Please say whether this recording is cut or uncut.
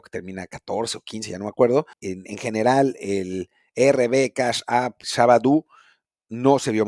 cut